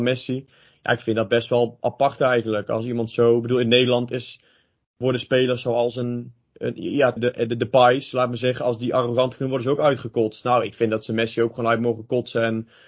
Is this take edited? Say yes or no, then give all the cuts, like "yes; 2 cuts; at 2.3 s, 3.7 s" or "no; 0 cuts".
yes; 1 cut; at 7.2 s